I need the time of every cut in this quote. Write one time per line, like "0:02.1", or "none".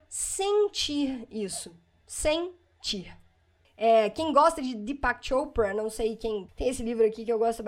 0:03.6
0:06.5